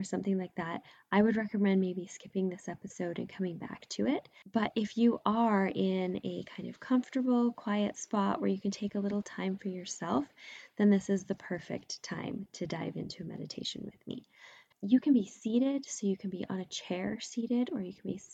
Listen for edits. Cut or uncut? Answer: cut